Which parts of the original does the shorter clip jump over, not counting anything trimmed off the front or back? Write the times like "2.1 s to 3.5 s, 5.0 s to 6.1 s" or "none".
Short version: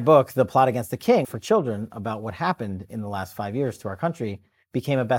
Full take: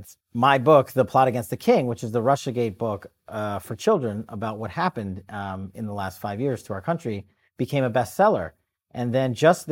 1.8 s to 3.6 s, 5.2 s to 5.7 s